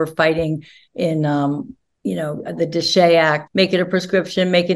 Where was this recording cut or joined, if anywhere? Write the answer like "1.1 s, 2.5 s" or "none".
3.5 s